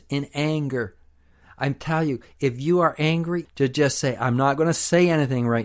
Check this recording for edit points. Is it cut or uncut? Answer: cut